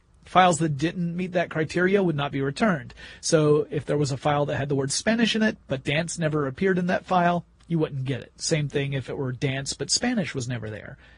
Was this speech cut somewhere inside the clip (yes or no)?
no